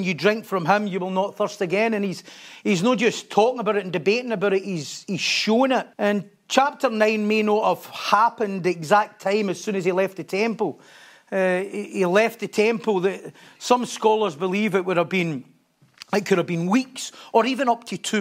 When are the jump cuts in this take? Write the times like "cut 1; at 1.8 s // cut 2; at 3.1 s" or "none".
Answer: cut 1; at 5.9 s